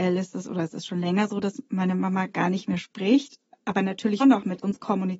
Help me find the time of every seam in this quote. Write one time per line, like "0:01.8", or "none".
0:04.2